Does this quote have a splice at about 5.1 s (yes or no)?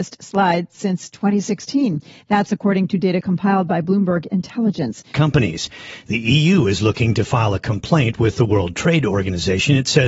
yes